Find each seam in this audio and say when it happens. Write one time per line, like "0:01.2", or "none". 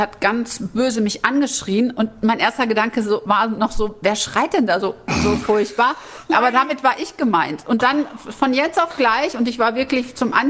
none

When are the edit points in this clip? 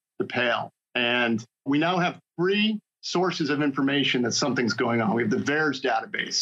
0:01.7

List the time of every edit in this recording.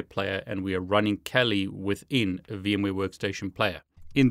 none

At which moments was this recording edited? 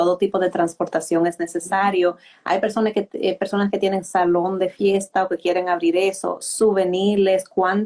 none

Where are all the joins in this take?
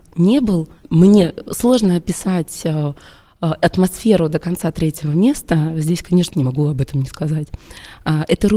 0:06.3

